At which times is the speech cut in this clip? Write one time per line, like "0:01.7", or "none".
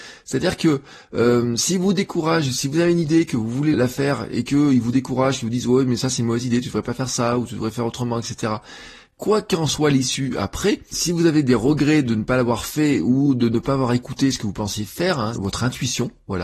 0:03.7
0:10.9
0:15.4